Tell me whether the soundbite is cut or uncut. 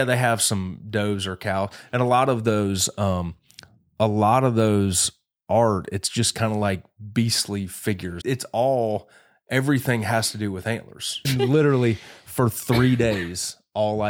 cut